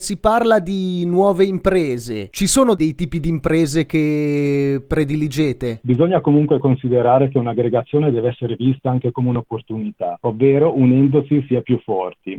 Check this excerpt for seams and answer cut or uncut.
cut